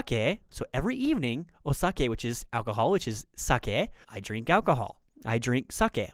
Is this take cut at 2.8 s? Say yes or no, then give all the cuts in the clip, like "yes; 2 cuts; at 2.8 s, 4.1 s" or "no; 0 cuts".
no; 1 cut; at 4.0 s